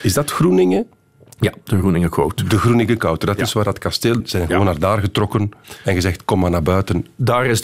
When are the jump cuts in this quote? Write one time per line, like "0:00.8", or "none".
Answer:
0:04.2